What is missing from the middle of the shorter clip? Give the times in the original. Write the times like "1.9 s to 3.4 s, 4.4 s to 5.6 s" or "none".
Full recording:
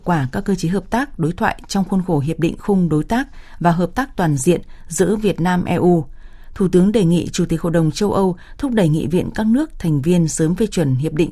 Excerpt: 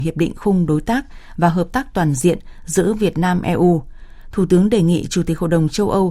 none